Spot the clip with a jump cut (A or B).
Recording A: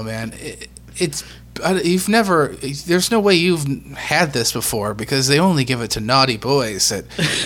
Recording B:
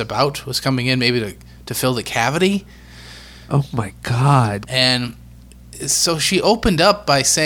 B